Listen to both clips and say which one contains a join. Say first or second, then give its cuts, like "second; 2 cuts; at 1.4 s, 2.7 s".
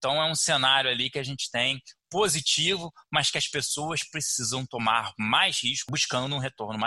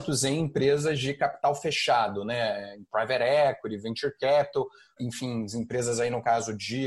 second; 1 cut; at 5.0 s